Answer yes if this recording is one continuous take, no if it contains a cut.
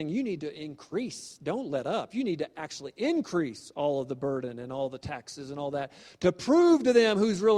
yes